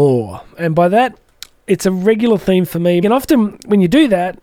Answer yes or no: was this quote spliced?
yes